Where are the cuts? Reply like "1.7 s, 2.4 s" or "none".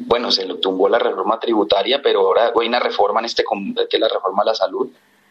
2.5 s, 3.8 s